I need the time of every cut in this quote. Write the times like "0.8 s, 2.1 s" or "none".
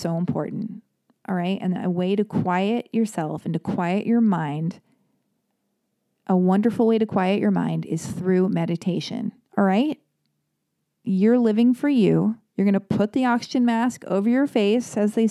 9.5 s